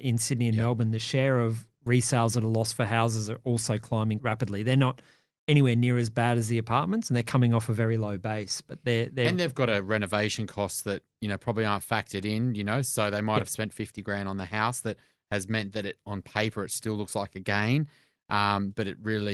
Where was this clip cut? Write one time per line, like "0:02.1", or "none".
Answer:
0:04.2